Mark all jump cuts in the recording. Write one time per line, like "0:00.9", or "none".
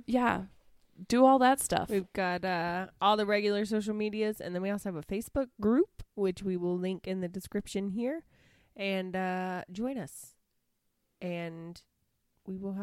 none

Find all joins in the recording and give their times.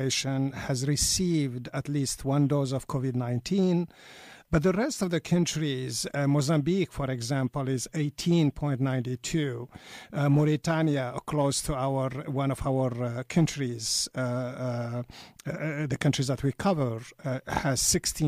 0:04.5

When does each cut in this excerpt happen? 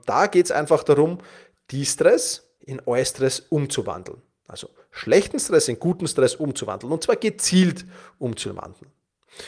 0:02.6

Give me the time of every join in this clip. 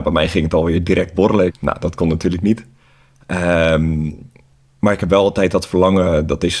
0:01.5

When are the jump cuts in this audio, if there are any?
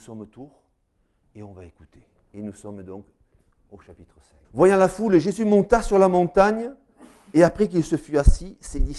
0:04.4

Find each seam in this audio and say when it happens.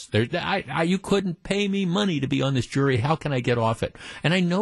none

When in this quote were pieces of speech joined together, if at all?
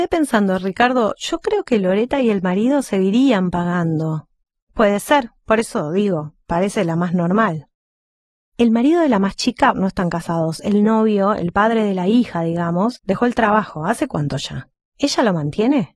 0:09.7

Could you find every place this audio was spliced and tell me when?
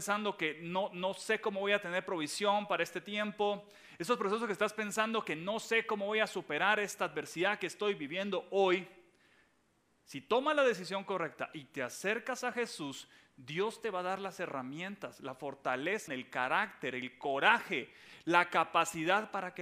0:16.1

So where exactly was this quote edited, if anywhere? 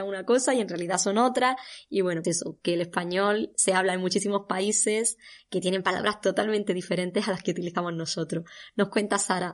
0:02.2
0:05.4

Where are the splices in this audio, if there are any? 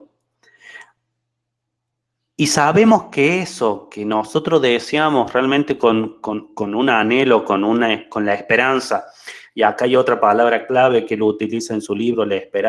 none

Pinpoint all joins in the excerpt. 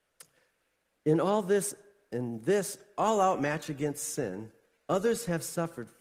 none

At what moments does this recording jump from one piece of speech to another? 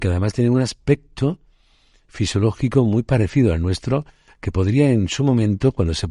none

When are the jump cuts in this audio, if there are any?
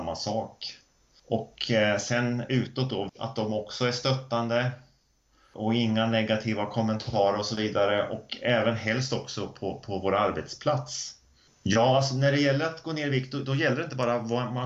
0:03.1
0:11.5

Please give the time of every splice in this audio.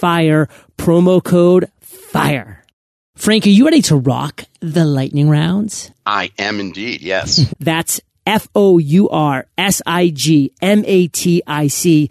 0:07.5

